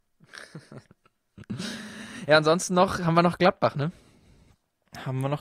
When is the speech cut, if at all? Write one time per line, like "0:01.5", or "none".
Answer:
none